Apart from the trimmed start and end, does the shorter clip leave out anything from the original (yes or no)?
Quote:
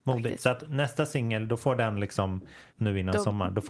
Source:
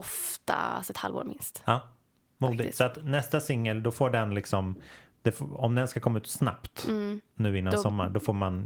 yes